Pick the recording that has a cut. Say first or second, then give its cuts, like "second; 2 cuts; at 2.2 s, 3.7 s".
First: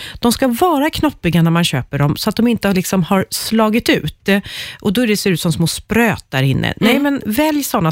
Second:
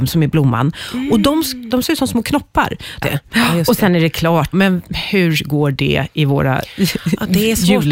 second; 3 cuts; at 1.7 s, 3.0 s, 4.5 s